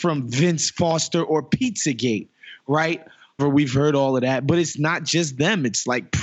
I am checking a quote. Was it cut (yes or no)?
yes